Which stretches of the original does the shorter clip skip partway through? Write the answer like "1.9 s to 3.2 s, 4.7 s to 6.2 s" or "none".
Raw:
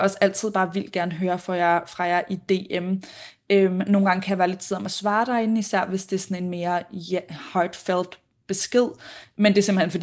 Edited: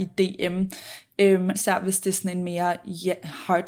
3.9 s to 5.6 s